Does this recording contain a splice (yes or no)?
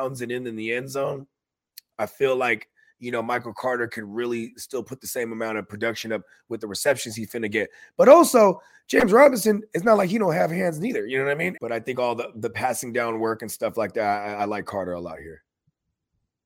yes